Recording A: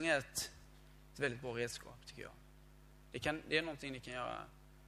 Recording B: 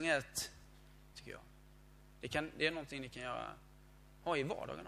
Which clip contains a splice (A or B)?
B